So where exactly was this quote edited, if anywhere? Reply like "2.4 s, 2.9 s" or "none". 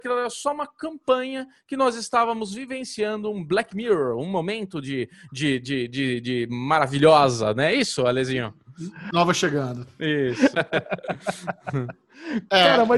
9.1 s, 10.5 s